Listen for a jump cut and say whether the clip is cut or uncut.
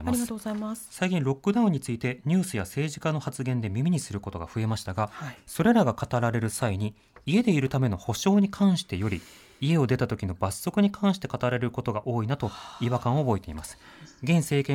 uncut